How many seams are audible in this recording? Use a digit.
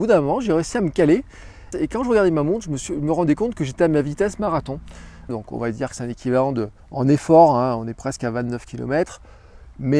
3